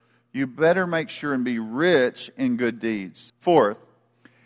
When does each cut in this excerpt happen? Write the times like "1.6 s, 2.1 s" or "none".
3.3 s